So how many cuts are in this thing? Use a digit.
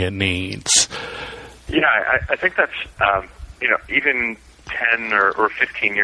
2